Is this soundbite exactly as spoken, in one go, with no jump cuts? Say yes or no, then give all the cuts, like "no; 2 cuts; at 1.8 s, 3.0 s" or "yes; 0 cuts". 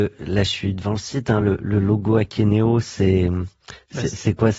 yes; 0 cuts